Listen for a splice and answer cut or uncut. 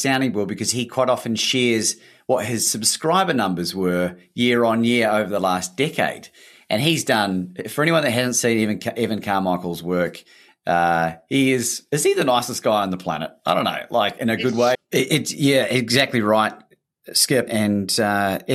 cut